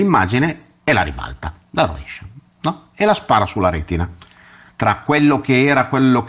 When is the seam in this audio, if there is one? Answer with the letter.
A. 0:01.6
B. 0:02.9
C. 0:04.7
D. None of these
C